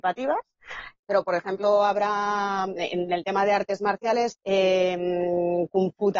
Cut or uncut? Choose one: cut